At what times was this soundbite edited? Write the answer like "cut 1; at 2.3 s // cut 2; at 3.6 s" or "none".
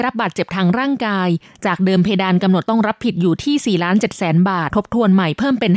cut 1; at 4.7 s